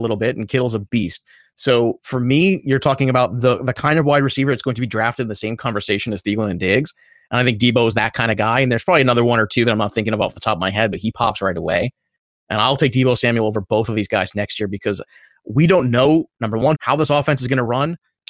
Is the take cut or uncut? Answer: cut